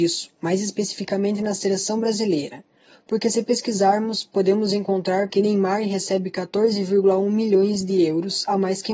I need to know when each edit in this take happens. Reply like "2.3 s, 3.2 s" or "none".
5.3 s